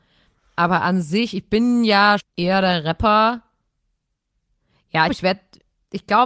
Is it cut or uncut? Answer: cut